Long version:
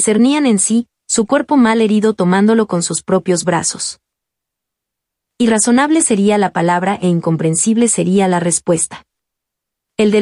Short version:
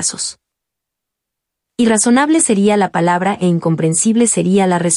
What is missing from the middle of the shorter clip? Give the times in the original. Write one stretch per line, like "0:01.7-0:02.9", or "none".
none